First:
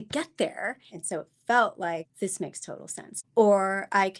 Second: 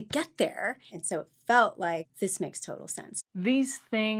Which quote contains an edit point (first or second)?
first